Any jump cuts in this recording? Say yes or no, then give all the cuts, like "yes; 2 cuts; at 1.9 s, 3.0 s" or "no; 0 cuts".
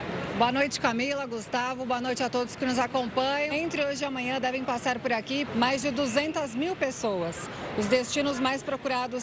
yes; 2 cuts; at 3.5 s, 5.5 s